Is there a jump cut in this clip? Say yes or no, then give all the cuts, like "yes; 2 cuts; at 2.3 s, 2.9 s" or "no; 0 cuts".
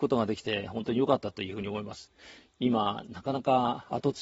no; 0 cuts